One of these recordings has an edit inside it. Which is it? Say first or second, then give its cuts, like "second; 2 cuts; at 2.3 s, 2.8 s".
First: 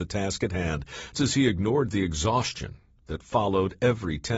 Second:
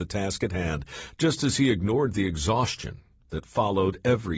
first; 1 cut; at 1.1 s